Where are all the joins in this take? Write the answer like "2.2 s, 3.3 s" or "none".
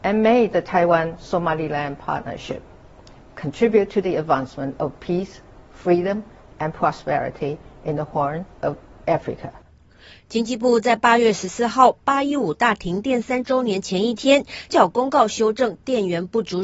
14.7 s